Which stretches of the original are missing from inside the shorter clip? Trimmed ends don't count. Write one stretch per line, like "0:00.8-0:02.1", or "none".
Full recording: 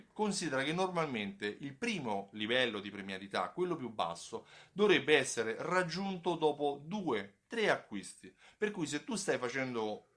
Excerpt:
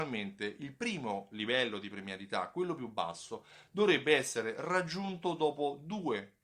none